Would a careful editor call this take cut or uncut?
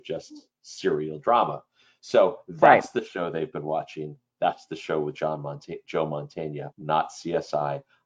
cut